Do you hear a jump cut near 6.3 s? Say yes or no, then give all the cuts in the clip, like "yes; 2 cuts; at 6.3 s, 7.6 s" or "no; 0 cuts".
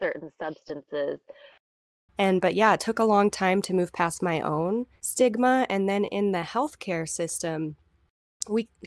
no; 2 cuts; at 2.1 s, 5.0 s